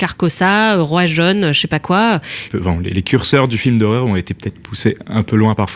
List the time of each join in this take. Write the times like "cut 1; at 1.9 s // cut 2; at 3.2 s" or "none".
cut 1; at 2.5 s